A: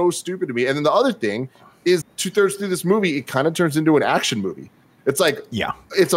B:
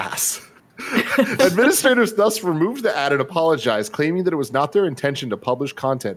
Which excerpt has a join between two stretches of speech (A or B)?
A